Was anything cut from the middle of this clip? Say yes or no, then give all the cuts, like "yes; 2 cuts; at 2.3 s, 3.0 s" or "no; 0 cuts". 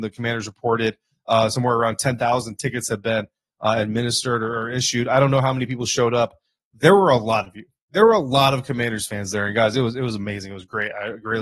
no; 0 cuts